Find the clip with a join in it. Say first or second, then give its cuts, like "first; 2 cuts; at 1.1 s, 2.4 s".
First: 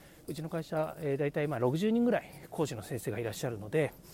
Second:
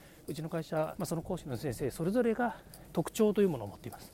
second; 1 cut; at 0.9 s